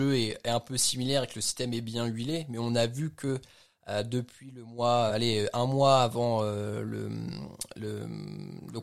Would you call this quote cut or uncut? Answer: cut